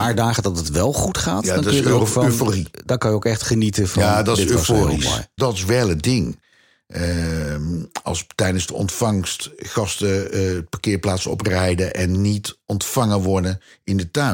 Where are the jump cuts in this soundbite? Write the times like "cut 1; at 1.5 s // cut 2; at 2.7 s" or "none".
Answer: cut 1; at 5.4 s